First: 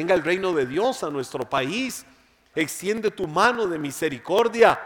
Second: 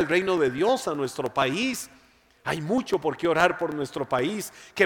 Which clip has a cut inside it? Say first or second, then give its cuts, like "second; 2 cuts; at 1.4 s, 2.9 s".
first; 1 cut; at 2.5 s